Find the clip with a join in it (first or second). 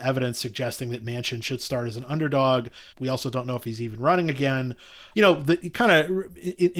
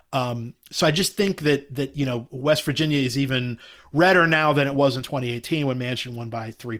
first